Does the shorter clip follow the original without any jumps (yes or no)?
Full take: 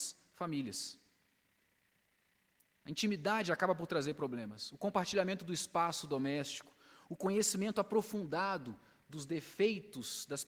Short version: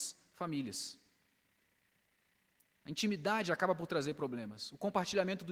yes